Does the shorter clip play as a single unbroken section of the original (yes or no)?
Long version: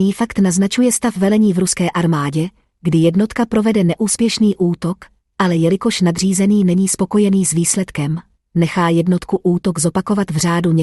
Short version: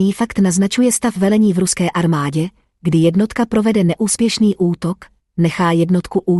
no